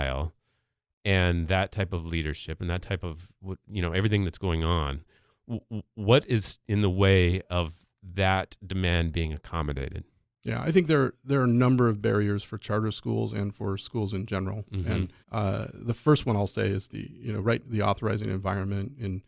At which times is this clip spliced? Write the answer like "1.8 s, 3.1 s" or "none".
15.2 s, 17.6 s